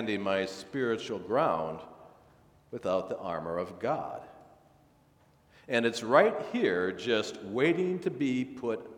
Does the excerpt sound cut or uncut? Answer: uncut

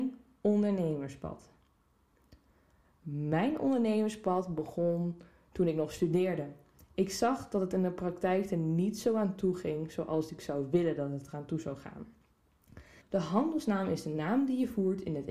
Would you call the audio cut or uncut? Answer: cut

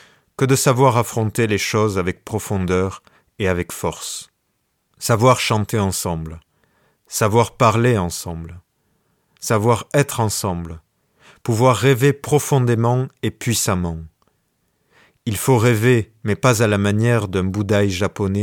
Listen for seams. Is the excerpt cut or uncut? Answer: uncut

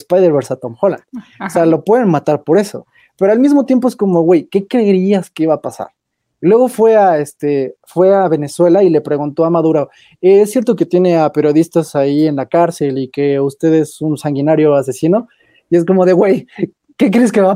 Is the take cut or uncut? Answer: uncut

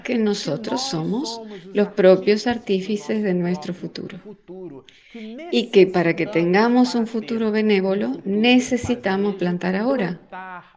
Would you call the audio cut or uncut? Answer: uncut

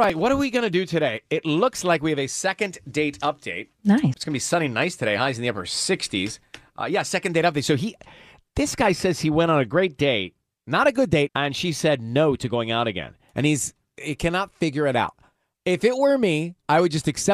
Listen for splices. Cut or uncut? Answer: cut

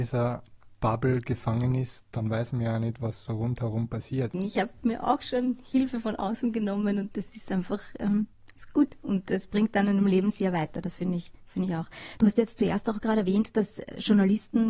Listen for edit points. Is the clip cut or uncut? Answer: cut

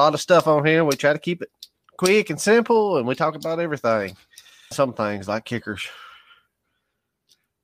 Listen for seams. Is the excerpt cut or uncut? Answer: cut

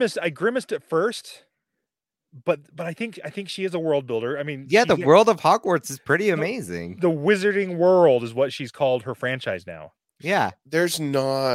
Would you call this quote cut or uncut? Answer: cut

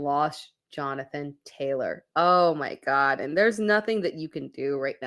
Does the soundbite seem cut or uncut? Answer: uncut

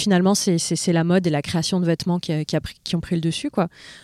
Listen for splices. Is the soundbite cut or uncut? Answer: uncut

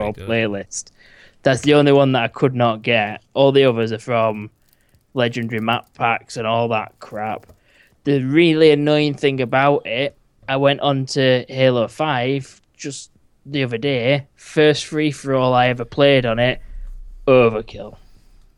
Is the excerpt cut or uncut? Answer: uncut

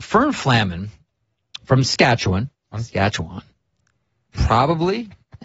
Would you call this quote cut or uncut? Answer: cut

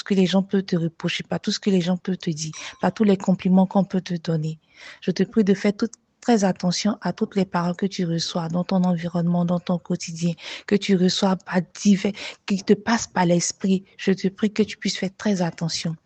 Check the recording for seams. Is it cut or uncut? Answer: uncut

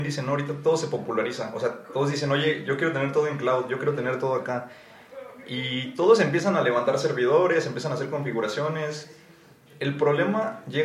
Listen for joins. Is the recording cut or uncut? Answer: uncut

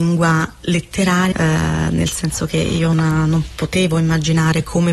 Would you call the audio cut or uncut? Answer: cut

